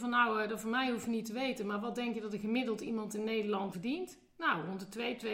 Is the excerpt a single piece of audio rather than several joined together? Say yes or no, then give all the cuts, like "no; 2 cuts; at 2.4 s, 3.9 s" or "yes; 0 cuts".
no; 1 cut; at 3.7 s